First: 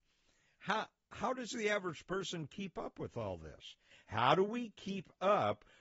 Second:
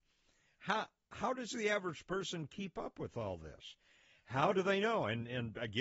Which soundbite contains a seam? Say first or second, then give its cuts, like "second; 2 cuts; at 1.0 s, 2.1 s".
first; 1 cut; at 3.9 s